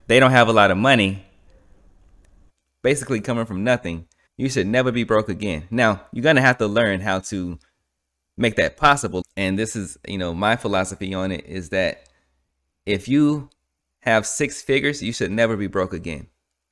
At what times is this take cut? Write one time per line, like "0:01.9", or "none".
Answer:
0:04.3
0:09.2